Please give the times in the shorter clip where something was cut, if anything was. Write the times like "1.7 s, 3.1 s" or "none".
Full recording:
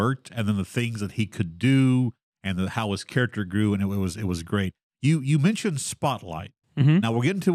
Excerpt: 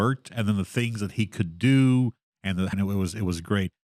2.7 s